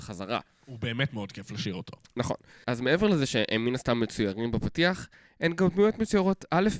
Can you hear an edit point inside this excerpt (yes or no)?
yes